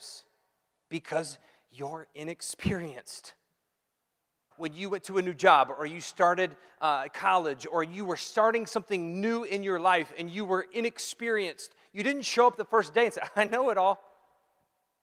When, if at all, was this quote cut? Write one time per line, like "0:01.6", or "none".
0:04.5